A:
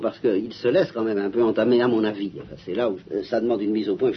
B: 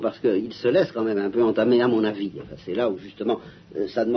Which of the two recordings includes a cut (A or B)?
A